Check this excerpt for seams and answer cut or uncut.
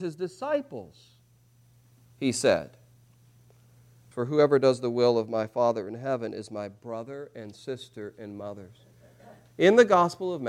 cut